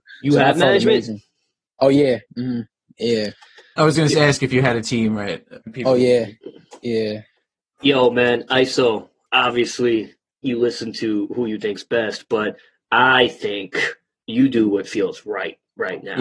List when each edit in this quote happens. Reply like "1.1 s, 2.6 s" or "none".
5.6 s